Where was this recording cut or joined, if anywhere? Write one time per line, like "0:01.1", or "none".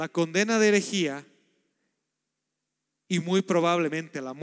none